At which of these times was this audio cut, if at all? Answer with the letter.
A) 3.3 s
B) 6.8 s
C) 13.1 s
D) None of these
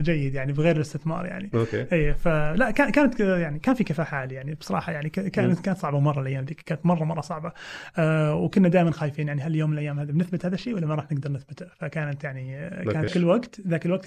C